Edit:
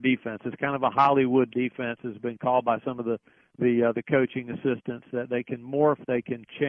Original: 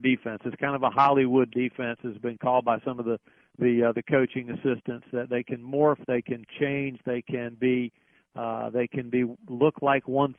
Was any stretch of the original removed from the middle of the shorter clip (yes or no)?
no